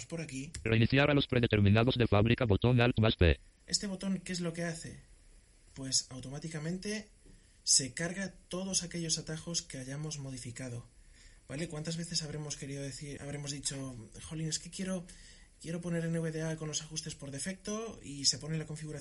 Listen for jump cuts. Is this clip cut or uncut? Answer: cut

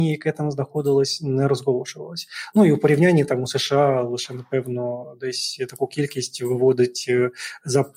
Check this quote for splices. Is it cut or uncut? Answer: uncut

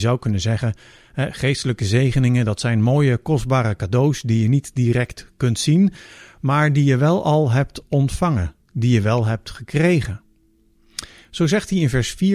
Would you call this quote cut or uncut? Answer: uncut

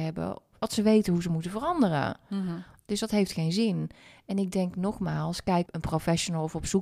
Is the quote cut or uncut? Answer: cut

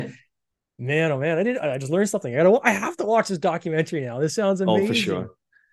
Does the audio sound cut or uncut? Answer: uncut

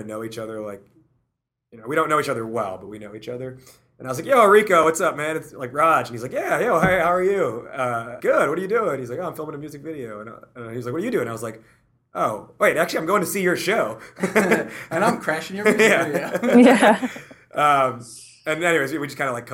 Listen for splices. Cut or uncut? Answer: cut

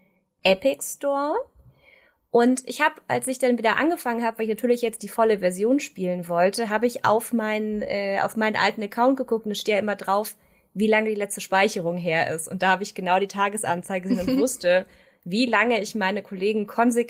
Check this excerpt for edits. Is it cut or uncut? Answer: uncut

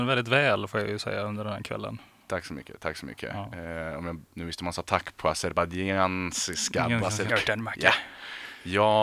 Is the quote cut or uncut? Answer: cut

